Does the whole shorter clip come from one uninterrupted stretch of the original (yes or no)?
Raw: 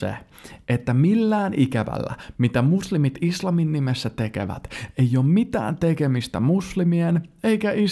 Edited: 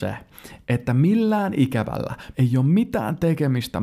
no